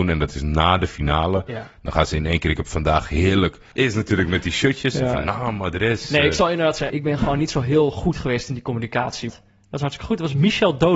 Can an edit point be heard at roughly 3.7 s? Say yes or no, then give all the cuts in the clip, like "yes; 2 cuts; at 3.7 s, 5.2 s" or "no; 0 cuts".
yes; 3 cuts; at 3.7 s, 6.9 s, 9.3 s